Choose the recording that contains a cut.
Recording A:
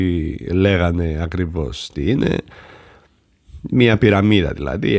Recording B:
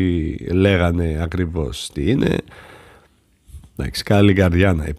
B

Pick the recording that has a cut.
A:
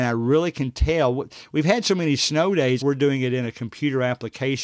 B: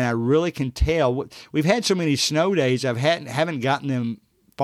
A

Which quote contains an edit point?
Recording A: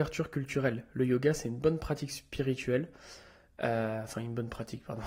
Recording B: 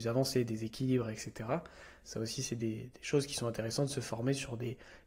B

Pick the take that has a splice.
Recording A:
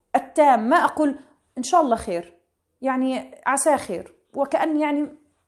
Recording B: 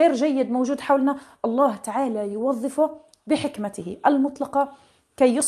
A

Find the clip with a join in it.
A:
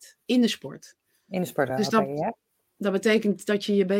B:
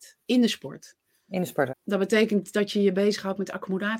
B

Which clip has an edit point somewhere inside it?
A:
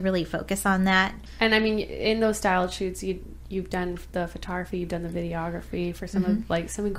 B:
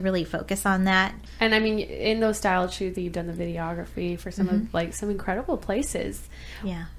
B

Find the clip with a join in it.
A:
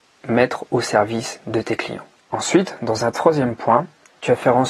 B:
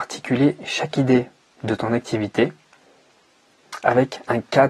A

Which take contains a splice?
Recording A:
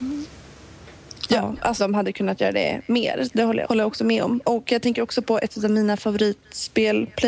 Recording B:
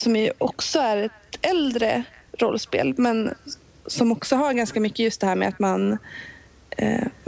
A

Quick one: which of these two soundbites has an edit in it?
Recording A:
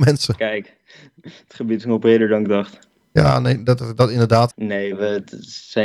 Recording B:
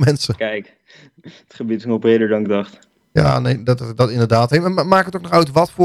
A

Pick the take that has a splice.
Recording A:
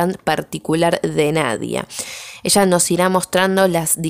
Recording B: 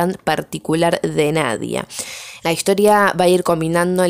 B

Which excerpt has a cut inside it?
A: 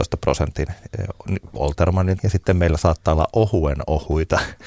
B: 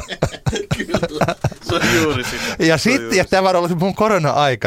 A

